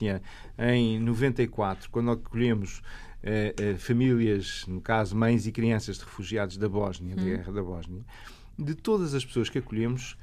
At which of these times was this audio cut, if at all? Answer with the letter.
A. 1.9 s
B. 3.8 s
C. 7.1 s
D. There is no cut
D